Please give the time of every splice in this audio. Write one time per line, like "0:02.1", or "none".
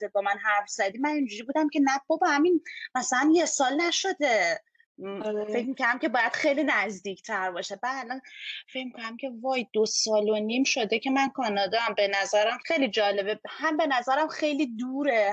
0:12.6